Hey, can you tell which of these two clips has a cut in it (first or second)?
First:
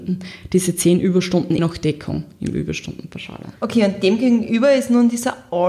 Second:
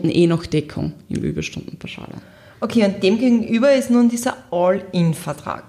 first